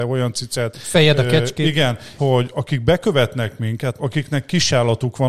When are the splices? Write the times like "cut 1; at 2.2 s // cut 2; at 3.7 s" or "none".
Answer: cut 1; at 2.2 s // cut 2; at 4.0 s

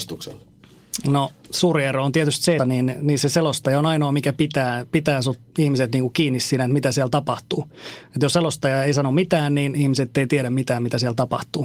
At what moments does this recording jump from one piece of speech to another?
cut 1; at 2.6 s

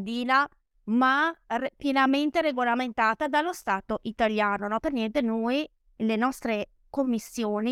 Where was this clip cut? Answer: none

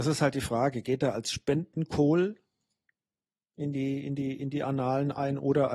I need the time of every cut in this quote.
none

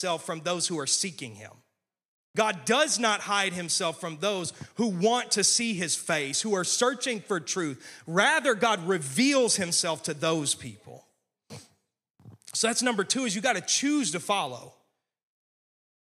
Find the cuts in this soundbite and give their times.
none

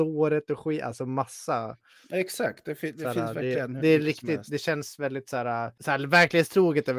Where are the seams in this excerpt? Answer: none

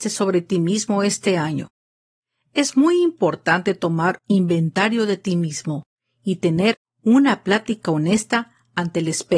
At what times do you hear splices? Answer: none

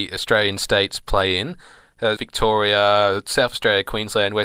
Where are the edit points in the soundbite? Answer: cut 1; at 2.2 s

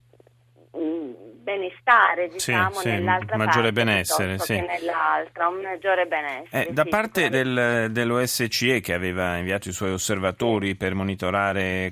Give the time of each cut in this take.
cut 1; at 7.3 s

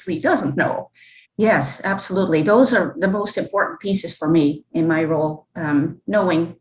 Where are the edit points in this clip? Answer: cut 1; at 1.2 s // cut 2; at 4.7 s

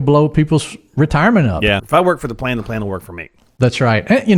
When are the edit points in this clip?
cut 1; at 1.8 s

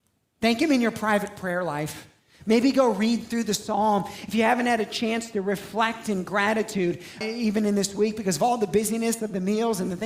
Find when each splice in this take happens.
cut 1; at 7.2 s

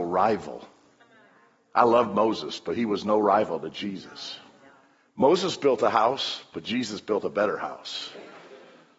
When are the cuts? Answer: none

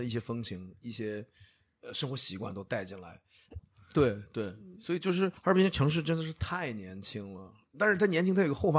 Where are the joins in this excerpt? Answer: cut 1; at 3.6 s

